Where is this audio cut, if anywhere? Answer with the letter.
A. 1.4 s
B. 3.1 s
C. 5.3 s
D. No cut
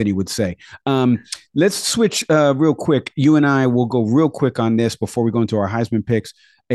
D